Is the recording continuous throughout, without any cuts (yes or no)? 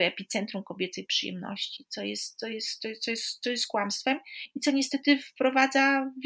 yes